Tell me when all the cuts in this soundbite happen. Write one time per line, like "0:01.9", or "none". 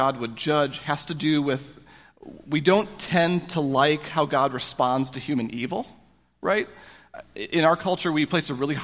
none